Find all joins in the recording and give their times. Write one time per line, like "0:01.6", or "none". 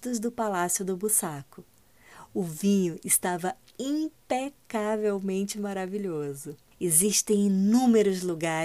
0:06.7